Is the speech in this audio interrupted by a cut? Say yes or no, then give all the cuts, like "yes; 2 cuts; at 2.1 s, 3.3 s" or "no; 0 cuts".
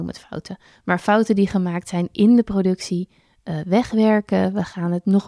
no; 0 cuts